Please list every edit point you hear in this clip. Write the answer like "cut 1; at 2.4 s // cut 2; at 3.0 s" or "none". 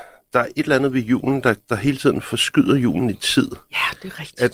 none